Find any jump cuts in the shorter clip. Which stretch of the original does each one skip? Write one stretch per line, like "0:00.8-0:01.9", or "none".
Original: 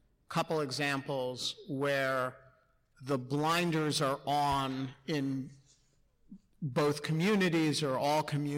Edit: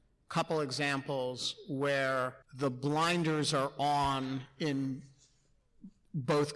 0:02.4-0:02.9